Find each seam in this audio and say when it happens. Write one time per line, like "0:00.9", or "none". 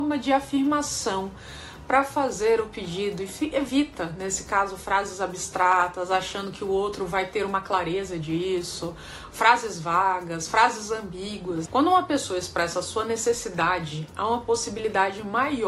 0:11.7